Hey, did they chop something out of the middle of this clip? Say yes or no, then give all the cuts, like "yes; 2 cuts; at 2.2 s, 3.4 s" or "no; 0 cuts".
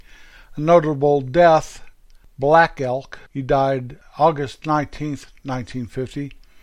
yes; 1 cut; at 3.3 s